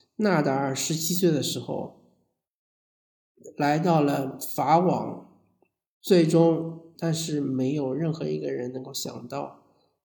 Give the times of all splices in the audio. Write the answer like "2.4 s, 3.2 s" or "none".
6.9 s